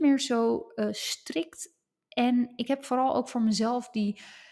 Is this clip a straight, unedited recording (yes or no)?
yes